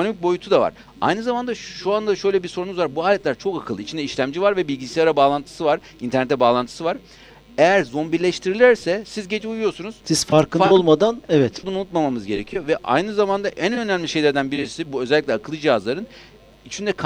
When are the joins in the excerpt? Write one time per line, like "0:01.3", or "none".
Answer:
0:10.0
0:11.6

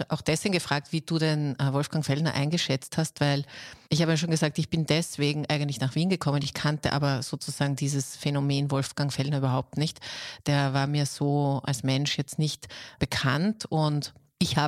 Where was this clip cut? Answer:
none

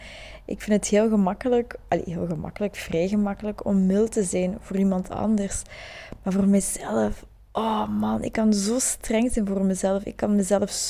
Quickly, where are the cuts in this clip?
none

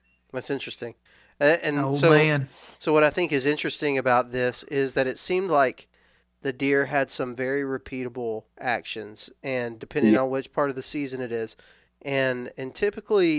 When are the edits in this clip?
0:08.5

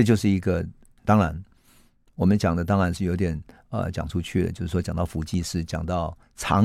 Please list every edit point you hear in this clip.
0:01.0

